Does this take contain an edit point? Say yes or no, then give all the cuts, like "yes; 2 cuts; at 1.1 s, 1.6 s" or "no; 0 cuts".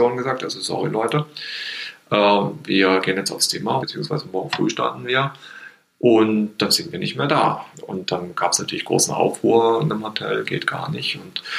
yes; 2 cuts; at 3.8 s, 7.7 s